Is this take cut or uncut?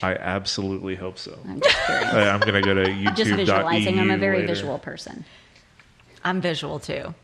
uncut